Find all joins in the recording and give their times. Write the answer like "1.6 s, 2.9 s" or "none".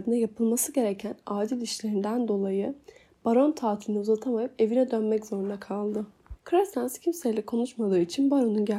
6.4 s